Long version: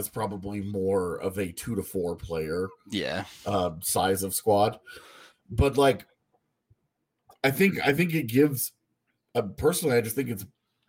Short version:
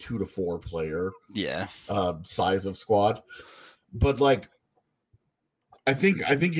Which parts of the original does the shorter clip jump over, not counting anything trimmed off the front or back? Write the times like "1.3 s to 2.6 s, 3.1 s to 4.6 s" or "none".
none